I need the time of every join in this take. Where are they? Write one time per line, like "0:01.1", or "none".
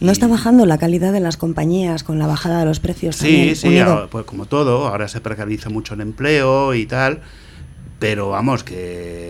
none